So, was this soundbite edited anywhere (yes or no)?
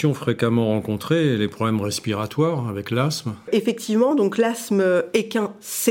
no